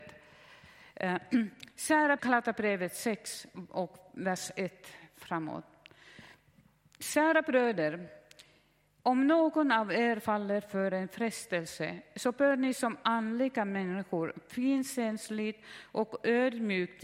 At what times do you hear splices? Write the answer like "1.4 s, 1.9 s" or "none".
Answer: 2.2 s